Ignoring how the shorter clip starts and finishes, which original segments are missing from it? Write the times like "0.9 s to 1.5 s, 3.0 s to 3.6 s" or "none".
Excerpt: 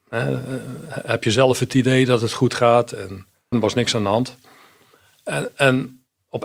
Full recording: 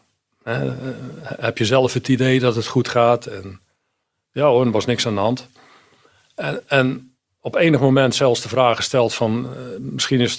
3.9 s to 4.6 s